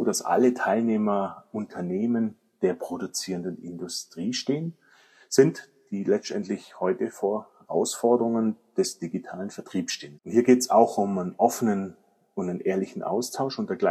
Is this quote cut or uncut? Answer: cut